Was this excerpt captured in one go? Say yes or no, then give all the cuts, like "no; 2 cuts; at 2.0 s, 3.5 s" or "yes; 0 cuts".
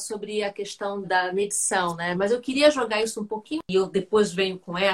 no; 2 cuts; at 1.0 s, 2.1 s